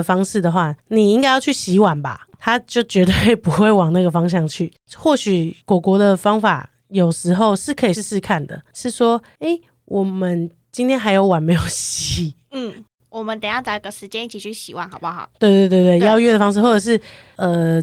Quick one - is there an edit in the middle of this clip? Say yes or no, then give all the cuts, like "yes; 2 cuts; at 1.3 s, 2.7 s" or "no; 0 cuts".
yes; 1 cut; at 7.9 s